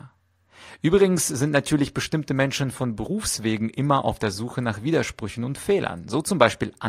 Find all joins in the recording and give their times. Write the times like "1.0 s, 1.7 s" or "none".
none